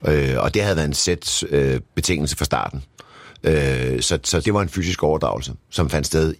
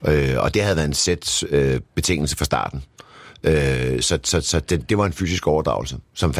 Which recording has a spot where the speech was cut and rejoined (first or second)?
first